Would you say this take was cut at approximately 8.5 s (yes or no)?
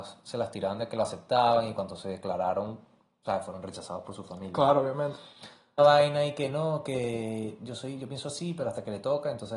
no